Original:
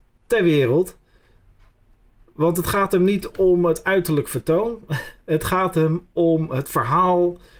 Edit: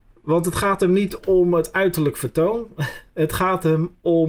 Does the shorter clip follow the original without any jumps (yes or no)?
yes